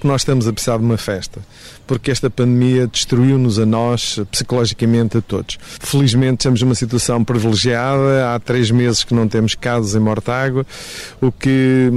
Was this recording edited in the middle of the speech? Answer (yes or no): no